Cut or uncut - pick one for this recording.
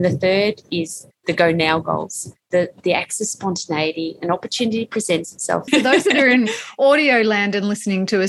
cut